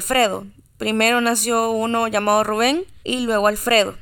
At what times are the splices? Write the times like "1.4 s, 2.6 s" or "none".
3.0 s